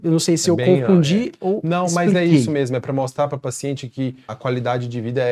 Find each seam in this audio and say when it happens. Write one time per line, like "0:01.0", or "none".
0:04.3